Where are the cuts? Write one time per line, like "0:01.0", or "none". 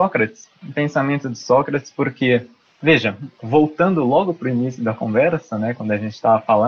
none